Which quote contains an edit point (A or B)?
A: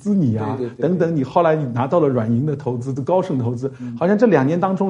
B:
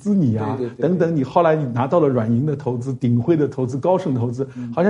A